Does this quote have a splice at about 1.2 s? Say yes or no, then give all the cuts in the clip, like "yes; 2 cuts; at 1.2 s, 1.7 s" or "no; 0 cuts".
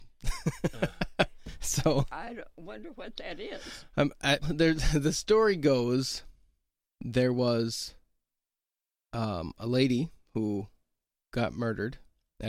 no; 1 cut; at 4.4 s